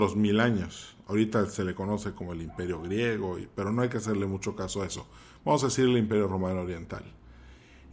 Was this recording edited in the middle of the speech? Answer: no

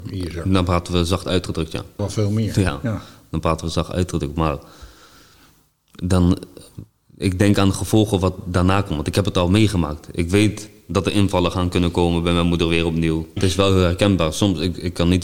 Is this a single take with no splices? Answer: no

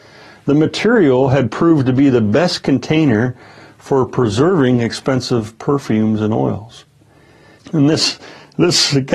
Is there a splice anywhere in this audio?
yes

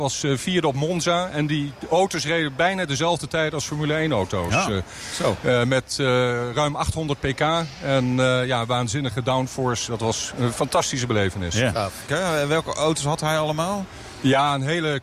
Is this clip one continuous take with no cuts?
no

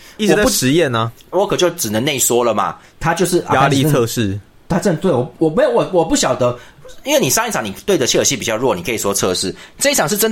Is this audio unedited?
no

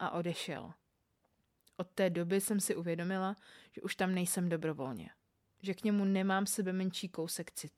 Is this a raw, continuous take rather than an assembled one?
yes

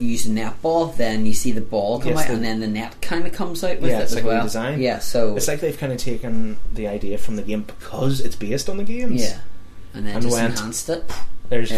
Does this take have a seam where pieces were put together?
no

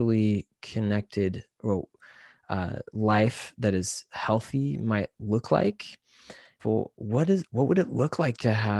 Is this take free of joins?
no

